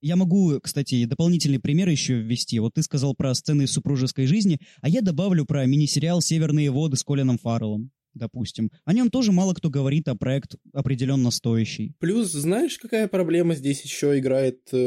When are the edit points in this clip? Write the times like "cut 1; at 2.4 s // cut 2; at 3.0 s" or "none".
none